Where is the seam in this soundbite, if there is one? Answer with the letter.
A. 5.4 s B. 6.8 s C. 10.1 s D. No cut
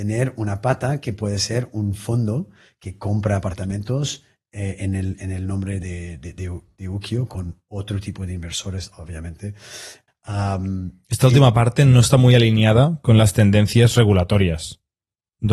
C